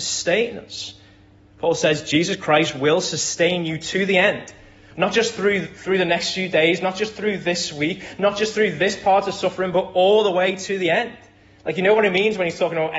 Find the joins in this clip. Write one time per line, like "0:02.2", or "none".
none

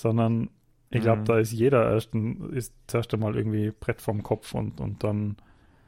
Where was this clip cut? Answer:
none

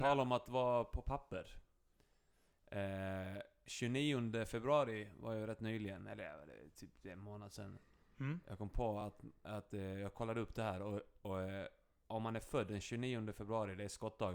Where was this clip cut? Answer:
none

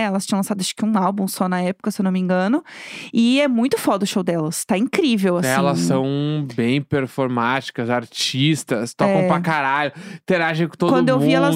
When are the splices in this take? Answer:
none

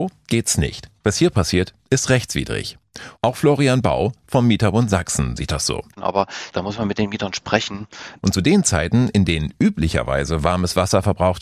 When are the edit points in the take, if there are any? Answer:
0:05.9
0:08.2

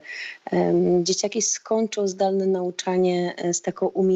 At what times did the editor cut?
none

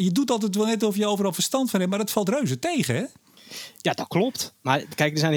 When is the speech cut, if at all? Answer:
none

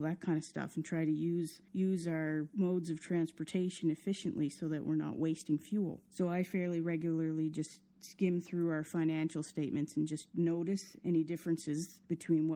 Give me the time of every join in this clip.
0:01.7

